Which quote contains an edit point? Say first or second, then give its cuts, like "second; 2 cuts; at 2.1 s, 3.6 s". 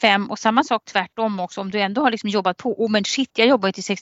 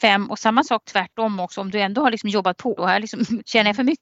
second; 1 cut; at 2.8 s